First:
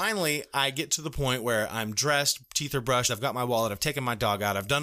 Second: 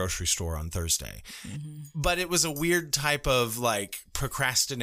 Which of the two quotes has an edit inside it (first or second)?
first